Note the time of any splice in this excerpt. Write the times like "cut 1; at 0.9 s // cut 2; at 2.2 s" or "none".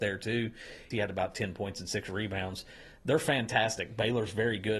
cut 1; at 0.9 s